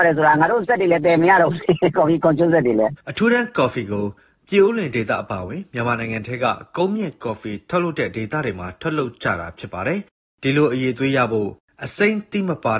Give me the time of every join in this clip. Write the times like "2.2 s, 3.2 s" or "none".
3.0 s